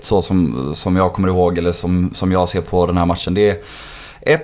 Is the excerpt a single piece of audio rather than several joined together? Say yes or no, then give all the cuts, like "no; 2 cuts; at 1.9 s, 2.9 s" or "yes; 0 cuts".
yes; 0 cuts